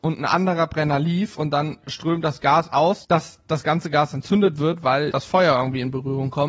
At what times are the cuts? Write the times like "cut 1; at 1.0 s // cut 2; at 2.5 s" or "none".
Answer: cut 1; at 3.0 s // cut 2; at 5.1 s